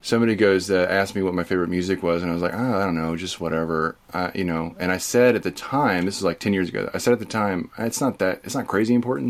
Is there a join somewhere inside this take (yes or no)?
no